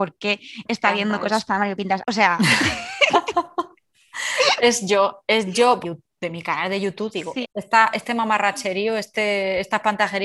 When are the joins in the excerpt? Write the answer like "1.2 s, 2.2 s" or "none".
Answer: 2.0 s, 5.8 s, 7.4 s